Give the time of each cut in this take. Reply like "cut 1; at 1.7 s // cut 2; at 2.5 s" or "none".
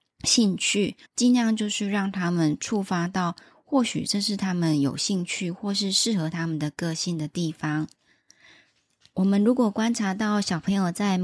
cut 1; at 1.0 s